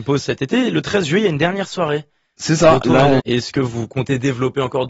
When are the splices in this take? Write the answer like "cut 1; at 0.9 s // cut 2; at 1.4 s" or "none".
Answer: cut 1; at 3.2 s